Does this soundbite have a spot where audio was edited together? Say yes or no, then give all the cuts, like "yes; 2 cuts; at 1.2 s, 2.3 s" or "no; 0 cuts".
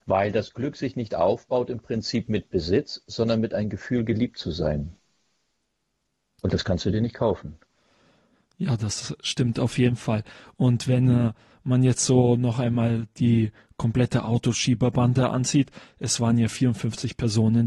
no; 0 cuts